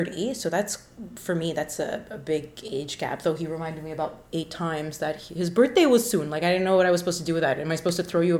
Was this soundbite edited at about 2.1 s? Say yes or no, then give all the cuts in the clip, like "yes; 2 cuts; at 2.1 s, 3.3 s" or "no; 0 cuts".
no; 0 cuts